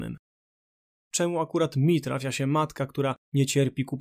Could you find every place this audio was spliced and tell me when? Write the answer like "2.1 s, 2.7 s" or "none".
0.9 s